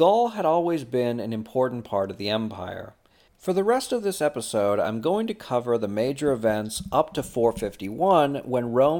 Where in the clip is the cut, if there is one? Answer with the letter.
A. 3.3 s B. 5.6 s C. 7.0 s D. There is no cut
A